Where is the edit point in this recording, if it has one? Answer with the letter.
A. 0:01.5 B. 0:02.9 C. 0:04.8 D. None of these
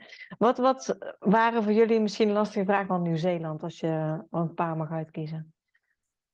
B